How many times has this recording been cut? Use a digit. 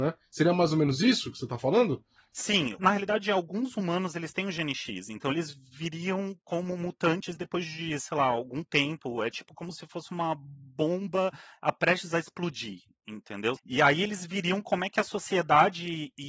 2